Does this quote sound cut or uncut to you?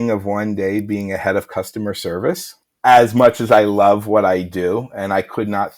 uncut